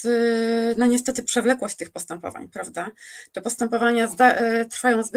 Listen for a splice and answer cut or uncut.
uncut